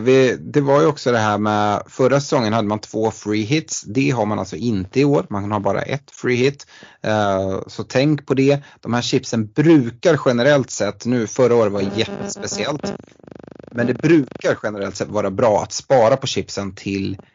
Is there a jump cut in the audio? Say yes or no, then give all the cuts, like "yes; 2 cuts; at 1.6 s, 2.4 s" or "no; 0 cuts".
no; 0 cuts